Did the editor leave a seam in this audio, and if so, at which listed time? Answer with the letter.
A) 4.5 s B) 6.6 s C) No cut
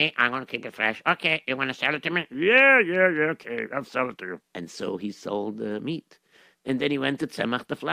A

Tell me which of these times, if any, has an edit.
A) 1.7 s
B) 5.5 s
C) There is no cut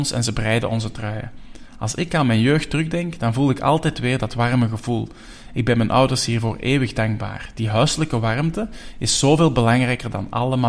C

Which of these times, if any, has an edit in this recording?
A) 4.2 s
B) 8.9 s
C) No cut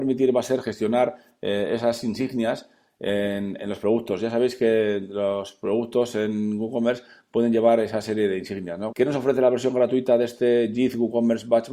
B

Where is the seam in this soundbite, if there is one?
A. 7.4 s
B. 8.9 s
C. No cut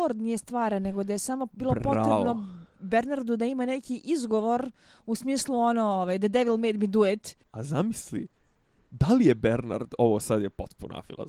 A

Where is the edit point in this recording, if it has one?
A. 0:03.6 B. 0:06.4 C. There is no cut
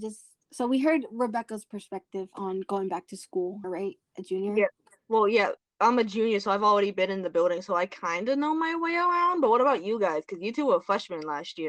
A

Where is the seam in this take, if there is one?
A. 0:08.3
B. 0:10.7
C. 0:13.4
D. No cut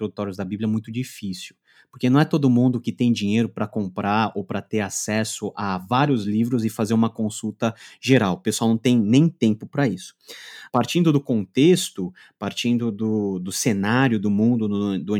B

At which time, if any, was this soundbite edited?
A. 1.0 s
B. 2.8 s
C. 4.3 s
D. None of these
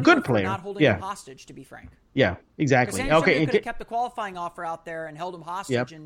D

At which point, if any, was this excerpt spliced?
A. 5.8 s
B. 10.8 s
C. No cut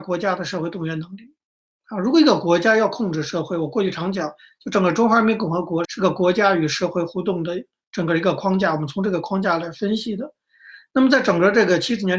A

